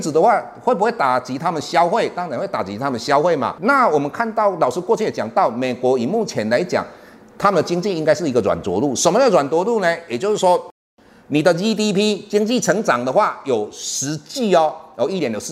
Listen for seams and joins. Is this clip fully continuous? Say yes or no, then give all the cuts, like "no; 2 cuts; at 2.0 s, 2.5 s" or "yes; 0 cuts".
yes; 0 cuts